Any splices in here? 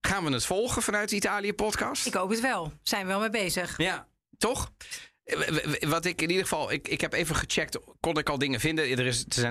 no; 0 cuts

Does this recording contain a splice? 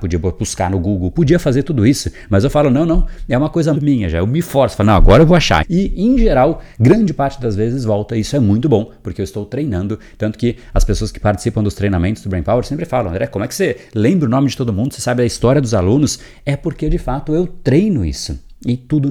yes; 2 cuts; at 3.8 s, 5.6 s

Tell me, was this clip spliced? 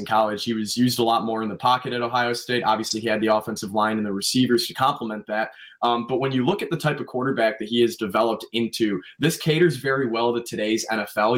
no; 0 cuts

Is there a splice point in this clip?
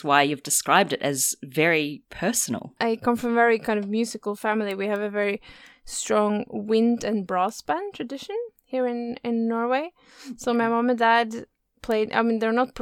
no; 0 cuts

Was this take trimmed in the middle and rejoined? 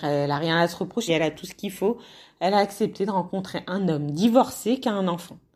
yes; 1 cut; at 1.1 s

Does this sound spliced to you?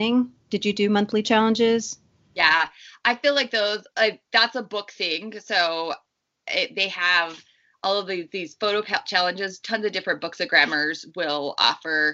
no; 0 cuts

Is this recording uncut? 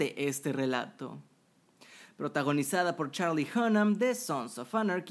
yes; 0 cuts

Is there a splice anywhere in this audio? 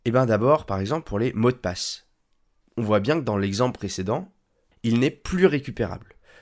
yes; 1 cut; at 4.7 s

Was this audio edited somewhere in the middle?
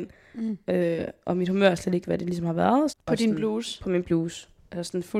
yes; 1 cut; at 2.9 s

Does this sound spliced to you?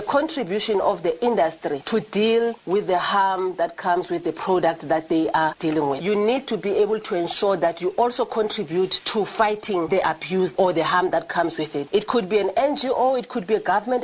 yes; 1 cut; at 6.0 s

